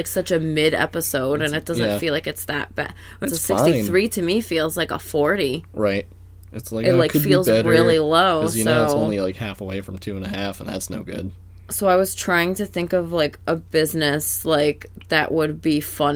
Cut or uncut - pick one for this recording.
cut